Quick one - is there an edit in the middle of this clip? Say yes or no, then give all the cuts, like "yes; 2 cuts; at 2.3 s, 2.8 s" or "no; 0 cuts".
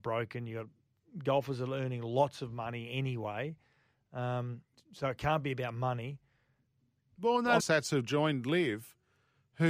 yes; 1 cut; at 7.6 s